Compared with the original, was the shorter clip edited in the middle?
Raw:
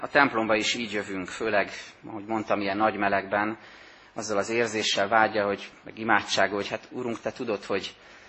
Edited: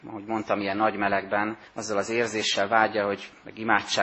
yes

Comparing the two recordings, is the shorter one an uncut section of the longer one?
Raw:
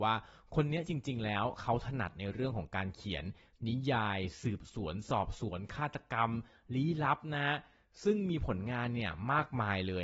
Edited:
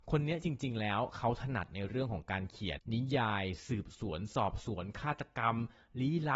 no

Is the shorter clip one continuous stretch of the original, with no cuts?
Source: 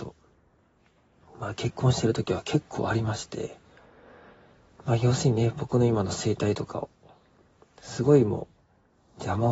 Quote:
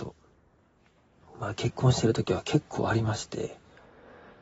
yes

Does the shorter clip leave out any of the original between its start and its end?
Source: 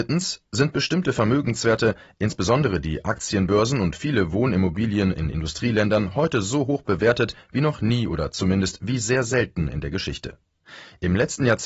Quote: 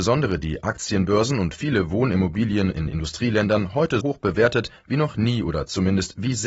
yes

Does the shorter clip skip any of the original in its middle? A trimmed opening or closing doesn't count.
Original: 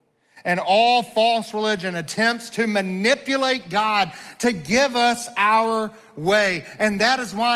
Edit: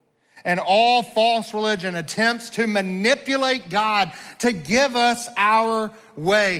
no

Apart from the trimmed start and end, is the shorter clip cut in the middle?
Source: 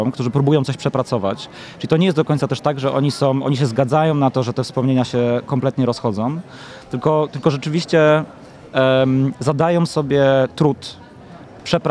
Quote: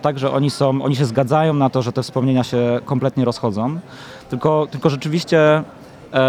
no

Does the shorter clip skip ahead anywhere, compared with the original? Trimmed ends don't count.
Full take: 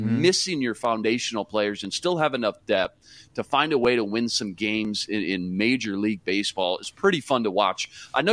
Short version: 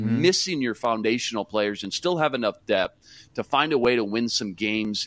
no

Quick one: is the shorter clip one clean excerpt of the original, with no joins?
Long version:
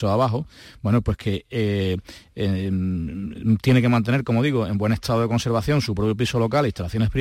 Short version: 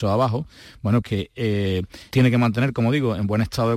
no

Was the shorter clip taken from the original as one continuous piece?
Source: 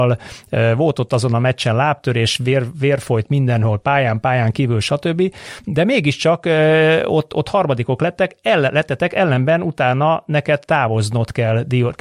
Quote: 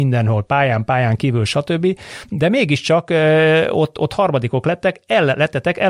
yes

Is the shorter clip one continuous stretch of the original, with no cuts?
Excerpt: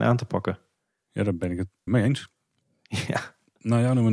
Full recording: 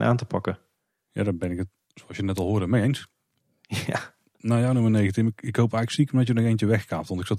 no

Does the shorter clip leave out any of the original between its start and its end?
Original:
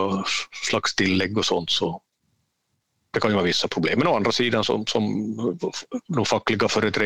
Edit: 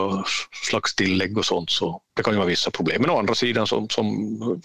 yes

